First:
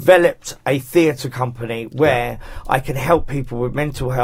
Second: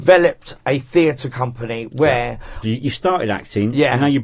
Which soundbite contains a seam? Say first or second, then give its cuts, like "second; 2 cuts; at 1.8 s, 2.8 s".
second; 1 cut; at 2.6 s